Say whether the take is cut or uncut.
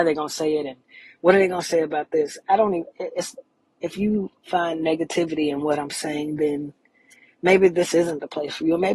uncut